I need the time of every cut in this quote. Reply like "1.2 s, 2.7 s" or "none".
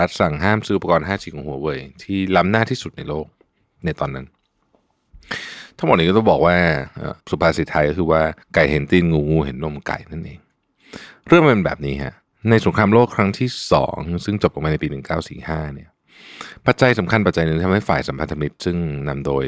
7.2 s, 8.4 s